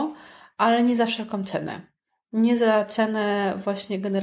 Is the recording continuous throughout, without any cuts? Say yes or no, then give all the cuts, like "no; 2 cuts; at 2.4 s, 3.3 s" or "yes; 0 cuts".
yes; 0 cuts